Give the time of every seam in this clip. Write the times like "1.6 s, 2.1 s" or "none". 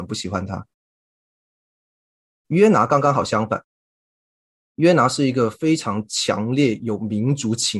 none